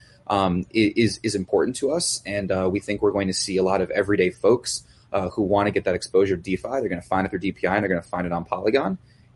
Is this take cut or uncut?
uncut